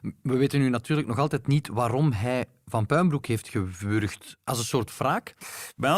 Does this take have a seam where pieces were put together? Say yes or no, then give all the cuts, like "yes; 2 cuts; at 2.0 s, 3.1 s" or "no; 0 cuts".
no; 0 cuts